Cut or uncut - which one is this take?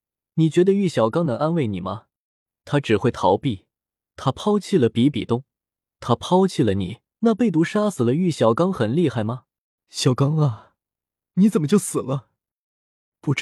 cut